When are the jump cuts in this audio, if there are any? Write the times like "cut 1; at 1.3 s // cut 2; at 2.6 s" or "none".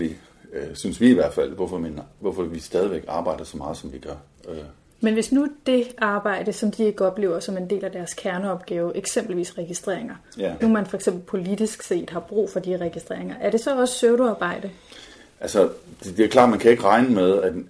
cut 1; at 10.6 s

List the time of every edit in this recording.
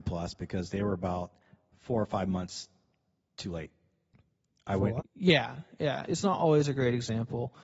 cut 1; at 5.0 s // cut 2; at 6.1 s

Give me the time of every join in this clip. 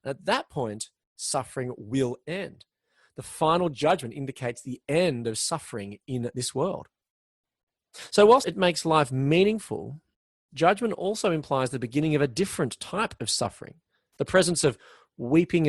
cut 1; at 8.4 s

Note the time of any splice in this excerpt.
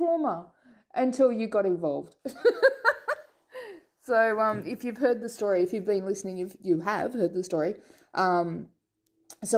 none

